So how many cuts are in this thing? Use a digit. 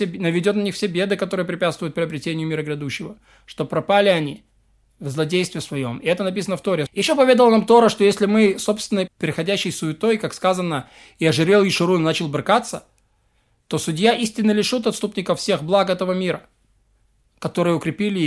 2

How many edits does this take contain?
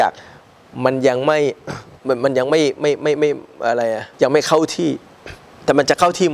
1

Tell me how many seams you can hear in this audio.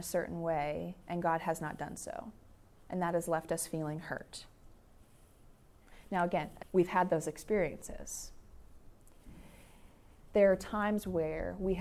2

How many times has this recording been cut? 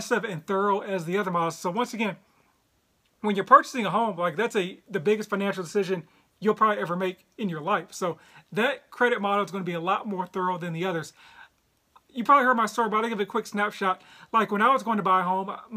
0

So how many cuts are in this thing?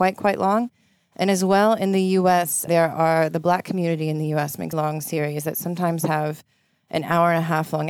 2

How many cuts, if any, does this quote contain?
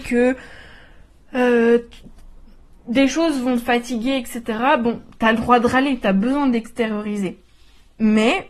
0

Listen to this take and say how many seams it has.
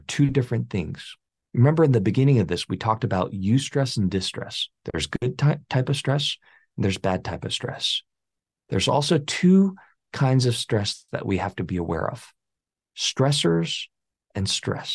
0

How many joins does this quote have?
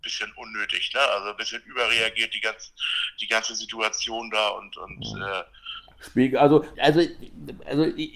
1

